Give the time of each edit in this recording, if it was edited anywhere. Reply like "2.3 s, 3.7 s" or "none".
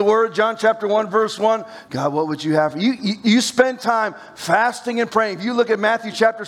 1.9 s, 3.2 s